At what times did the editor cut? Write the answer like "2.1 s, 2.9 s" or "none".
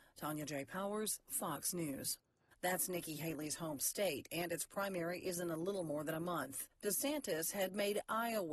2.5 s